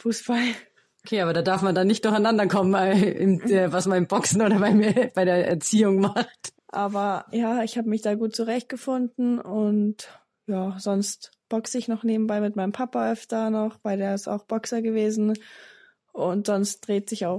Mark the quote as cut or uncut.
cut